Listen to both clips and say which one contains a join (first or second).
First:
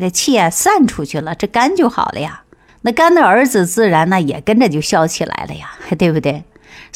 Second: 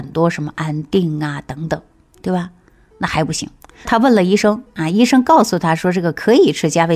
second